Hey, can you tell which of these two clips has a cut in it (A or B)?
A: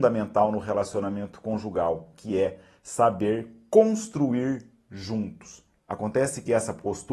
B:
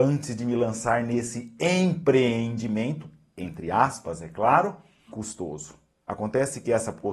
A